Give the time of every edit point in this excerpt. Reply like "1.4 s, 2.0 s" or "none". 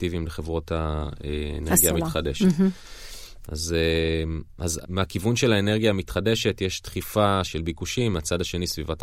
4.8 s, 7.5 s

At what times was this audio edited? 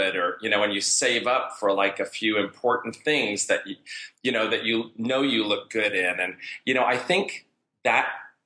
none

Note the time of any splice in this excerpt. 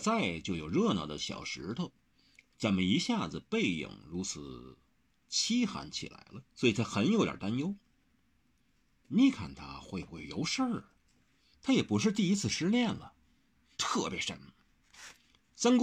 6.5 s, 11.5 s, 13.7 s

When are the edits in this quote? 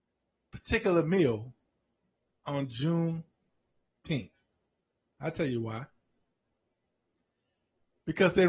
none

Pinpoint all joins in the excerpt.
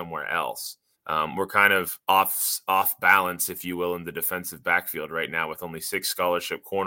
0.9 s, 2.0 s

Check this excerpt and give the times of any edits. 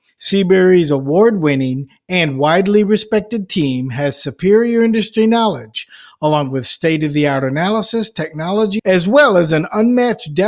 8.8 s

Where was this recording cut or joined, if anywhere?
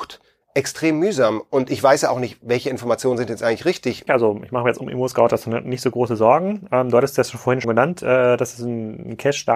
4.1 s, 7.6 s

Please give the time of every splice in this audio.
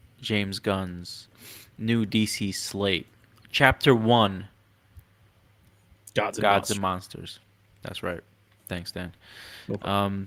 none

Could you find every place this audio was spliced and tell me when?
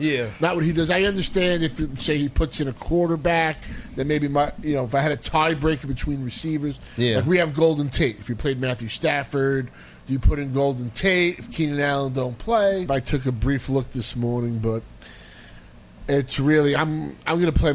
12.9 s

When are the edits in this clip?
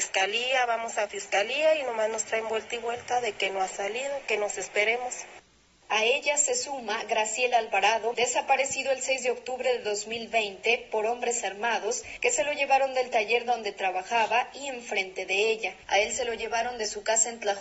8.1 s, 15.8 s

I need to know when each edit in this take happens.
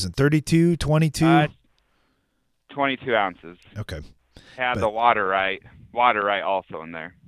4.6 s

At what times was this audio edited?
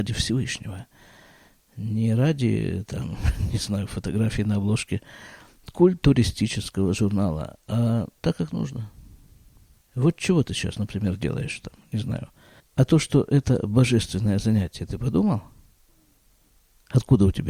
8.2 s, 12.6 s

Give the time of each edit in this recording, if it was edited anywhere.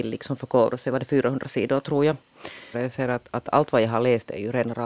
2.7 s

